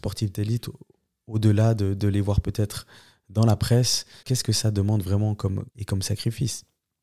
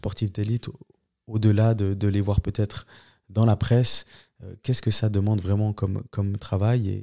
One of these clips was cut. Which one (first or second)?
first